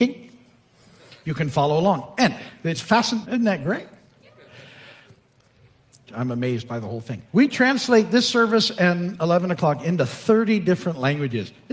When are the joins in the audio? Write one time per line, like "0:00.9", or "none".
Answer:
0:03.2
0:06.1
0:07.3

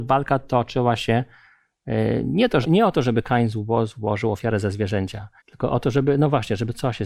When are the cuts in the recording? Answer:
0:02.6
0:05.4

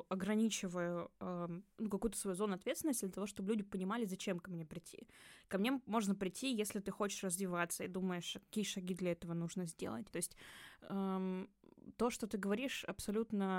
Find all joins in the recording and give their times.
0:10.1

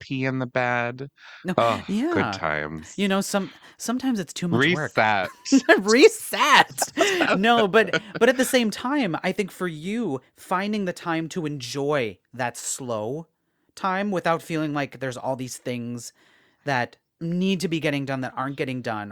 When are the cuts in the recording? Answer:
none

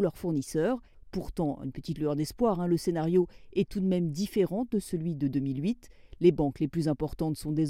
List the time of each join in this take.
none

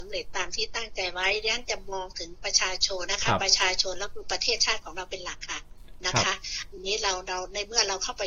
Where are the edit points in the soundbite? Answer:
0:03.0

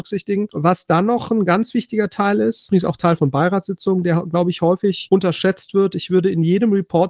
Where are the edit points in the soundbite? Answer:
none

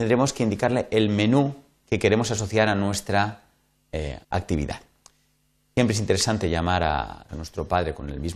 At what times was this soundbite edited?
0:04.2
0:07.3

